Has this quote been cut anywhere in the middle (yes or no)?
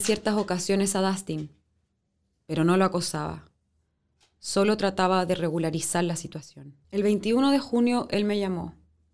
yes